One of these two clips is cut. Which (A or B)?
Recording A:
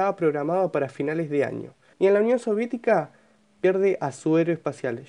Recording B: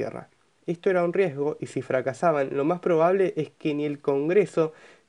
A